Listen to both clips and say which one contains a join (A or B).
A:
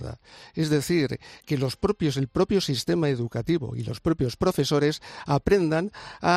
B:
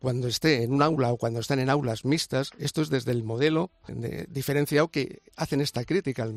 B